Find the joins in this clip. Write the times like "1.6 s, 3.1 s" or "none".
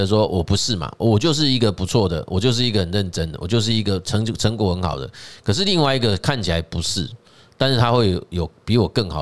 none